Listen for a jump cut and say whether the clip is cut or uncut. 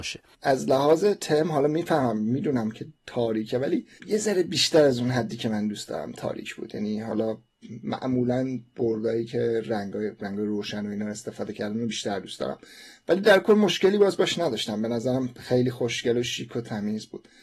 cut